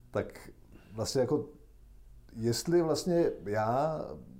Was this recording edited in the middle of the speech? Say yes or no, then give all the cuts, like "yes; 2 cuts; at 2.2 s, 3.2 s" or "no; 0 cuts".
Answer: no; 0 cuts